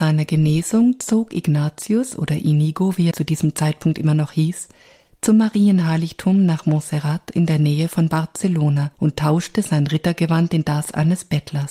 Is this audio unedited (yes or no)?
no